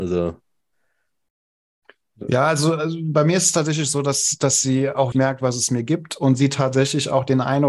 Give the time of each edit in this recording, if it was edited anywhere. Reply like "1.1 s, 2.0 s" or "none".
5.1 s